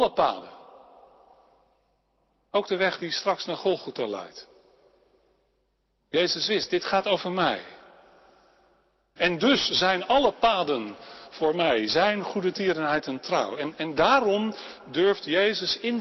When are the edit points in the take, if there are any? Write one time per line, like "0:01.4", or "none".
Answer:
0:09.2